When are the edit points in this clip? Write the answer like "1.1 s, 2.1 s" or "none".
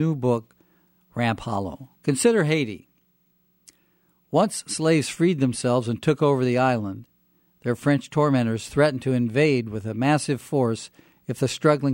2.0 s